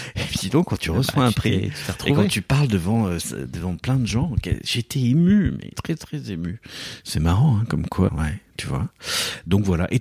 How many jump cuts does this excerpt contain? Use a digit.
2